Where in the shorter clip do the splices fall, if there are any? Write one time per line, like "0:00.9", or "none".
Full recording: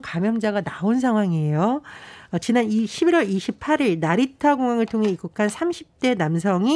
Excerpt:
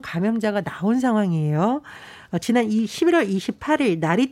none